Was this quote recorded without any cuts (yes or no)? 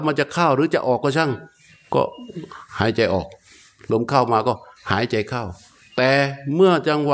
no